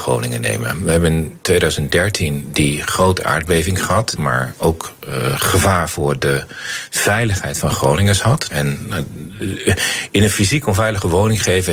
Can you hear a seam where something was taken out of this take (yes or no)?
yes